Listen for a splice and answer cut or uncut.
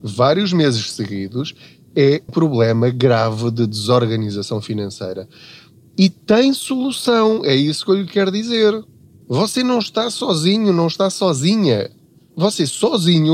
cut